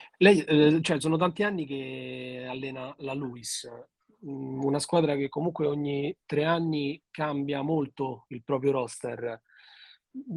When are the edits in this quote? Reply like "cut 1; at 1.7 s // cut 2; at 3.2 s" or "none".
none